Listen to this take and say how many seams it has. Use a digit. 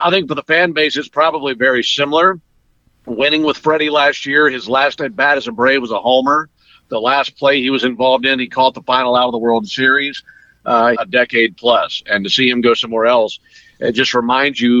1